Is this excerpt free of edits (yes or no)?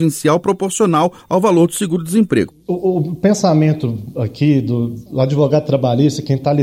no